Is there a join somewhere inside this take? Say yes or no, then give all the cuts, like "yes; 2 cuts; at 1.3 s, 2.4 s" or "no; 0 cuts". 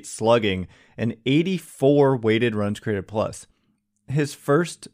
no; 0 cuts